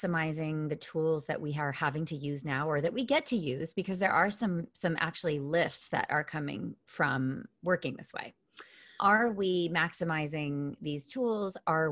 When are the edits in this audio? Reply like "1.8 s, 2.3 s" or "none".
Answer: none

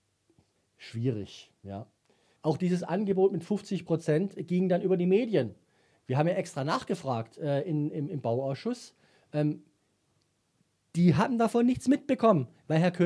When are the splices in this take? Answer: 2.4 s

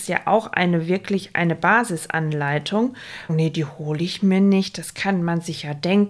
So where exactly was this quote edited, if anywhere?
3.3 s

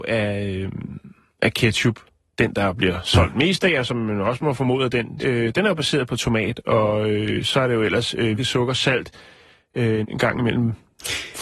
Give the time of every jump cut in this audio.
5.2 s, 8.4 s, 10.0 s

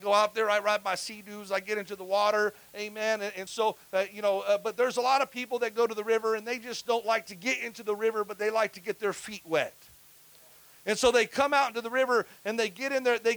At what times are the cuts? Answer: none

